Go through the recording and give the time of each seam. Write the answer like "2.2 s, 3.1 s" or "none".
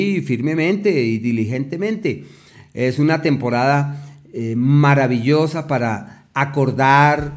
none